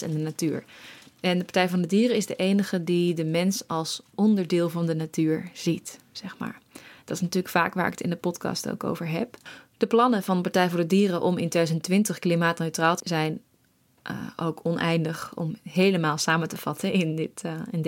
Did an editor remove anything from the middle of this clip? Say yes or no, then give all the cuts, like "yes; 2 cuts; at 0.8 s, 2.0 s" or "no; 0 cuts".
yes; 1 cut; at 13.0 s